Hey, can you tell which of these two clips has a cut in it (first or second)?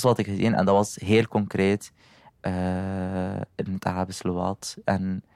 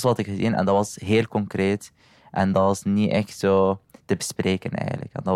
first